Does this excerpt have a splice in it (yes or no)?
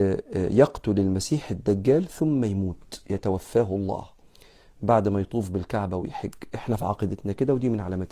no